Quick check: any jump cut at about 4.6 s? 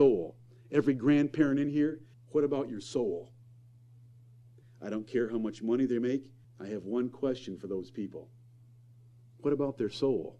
yes; 3 cuts; at 2.1 s, 4.6 s, 6.4 s

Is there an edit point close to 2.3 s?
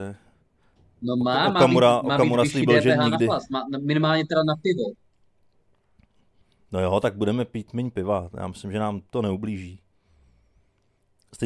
no; 0 cuts

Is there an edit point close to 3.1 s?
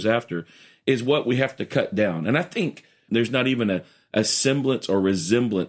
yes; 1 cut; at 3.1 s

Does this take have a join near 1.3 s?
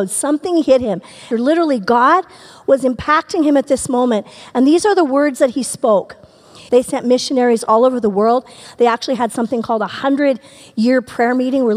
yes; 2 cuts; at 1.3 s, 6.7 s

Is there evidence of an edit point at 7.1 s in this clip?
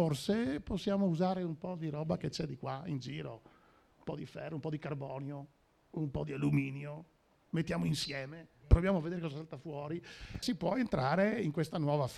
no; 1 cut; at 10.4 s

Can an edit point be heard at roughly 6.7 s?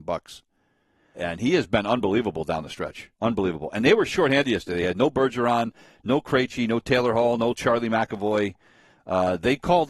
no; 2 cuts; at 1.1 s, 3.2 s

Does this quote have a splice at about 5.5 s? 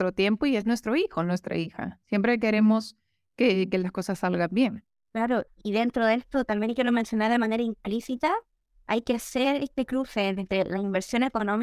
yes; 1 cut; at 5.5 s

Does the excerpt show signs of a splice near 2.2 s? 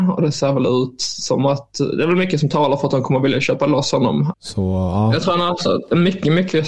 no; 1 cut; at 4.3 s

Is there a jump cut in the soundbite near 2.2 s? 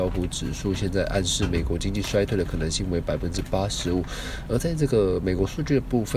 no; 1 cut; at 4.5 s

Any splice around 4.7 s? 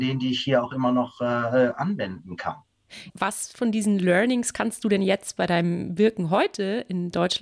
no; 1 cut; at 3.1 s

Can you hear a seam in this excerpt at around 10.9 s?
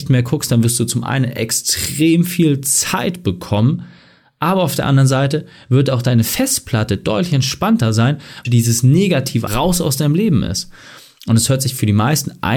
no; 2 cuts; at 8.4 s, 9.5 s

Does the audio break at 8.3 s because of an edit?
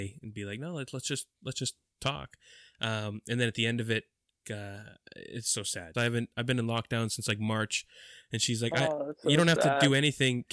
no; 2 cuts; at 4.4 s, 5.9 s

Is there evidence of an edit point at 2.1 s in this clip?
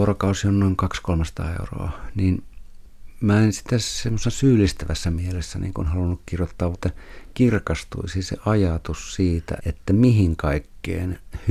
no; 2 cuts; at 6.7 s, 9.6 s

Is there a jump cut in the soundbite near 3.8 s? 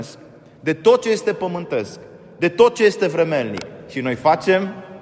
no; 0 cuts

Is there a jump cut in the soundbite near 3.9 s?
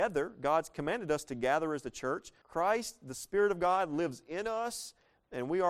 no; 1 cut; at 2.4 s

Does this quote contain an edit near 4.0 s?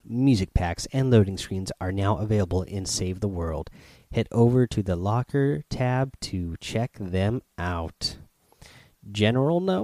no; 0 cuts

